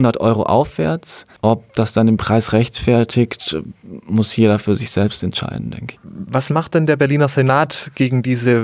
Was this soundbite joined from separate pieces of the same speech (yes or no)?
yes